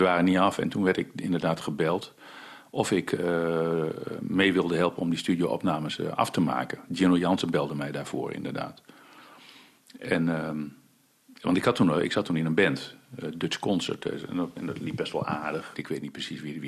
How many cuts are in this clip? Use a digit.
2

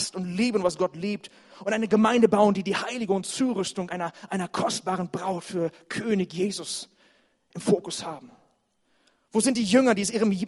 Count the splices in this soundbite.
0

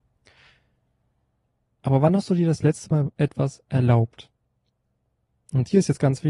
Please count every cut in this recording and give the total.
0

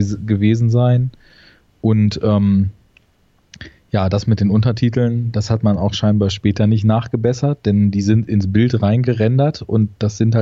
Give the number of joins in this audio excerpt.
0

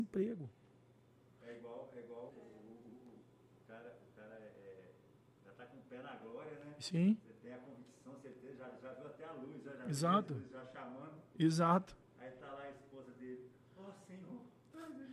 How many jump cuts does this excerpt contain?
1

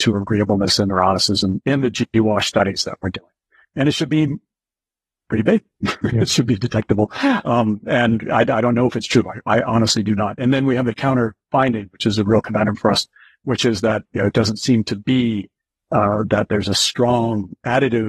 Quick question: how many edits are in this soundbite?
0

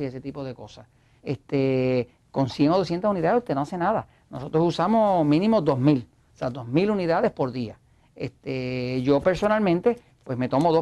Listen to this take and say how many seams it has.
1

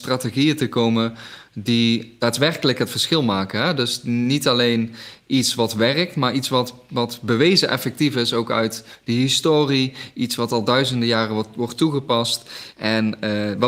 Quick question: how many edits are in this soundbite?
1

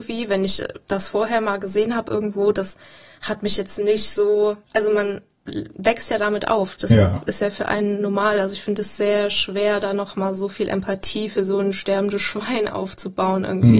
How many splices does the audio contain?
1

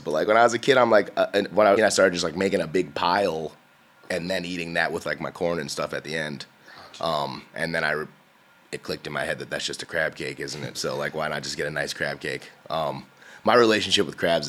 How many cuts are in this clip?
2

